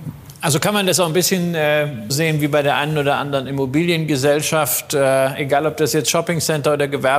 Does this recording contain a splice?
yes; 1 cut; at 2.1 s

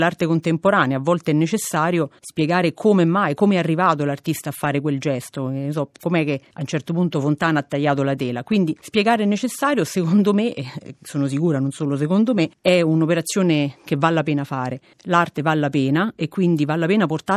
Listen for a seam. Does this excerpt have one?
no; 0 cuts

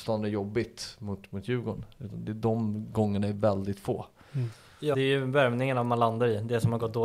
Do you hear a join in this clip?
yes; 1 cut; at 4.9 s

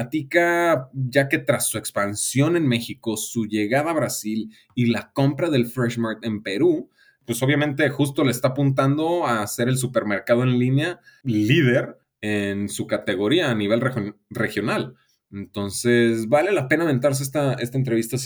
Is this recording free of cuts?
yes; 0 cuts

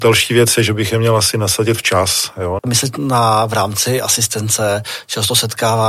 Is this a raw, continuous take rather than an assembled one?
no; 1 cut; at 2.6 s

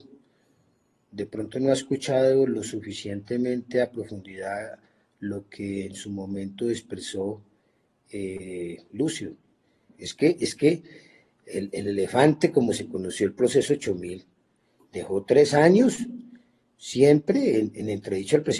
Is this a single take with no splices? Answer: no; 1 cut; at 9.9 s

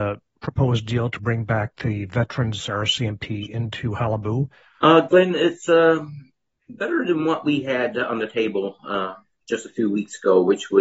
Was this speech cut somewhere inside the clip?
yes; 1 cut; at 4.8 s

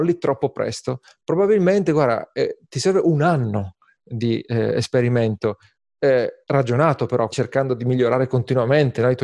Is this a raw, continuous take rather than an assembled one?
no; 1 cut; at 7.3 s

